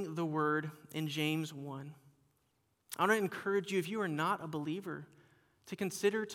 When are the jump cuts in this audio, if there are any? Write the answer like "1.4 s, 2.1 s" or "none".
none